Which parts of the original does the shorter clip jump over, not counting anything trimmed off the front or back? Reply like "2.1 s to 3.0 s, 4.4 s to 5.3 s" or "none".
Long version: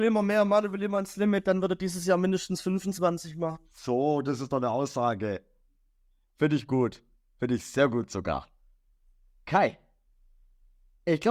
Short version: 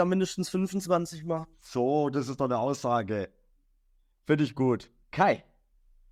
7.2 s to 9.4 s